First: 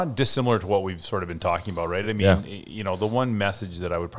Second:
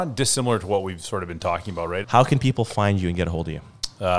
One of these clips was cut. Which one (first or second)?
second